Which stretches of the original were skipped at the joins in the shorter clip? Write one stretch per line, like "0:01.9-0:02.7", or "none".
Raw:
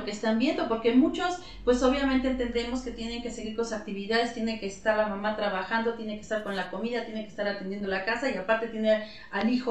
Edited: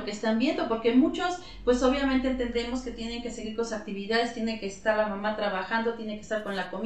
none